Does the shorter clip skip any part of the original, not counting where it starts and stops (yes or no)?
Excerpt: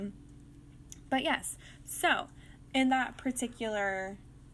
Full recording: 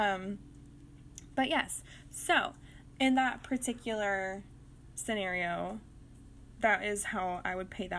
no